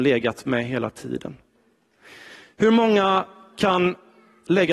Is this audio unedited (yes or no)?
yes